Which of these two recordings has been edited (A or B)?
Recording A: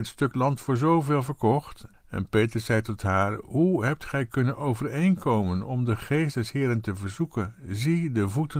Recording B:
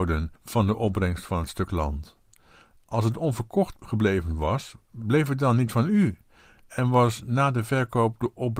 A